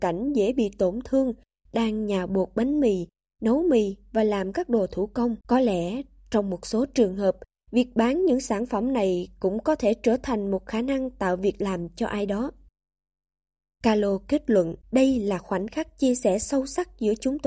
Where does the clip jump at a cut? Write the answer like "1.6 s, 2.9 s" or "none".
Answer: 5.4 s, 14.8 s